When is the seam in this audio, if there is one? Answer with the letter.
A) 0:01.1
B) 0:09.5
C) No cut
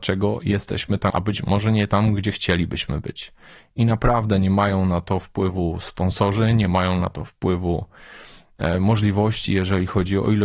A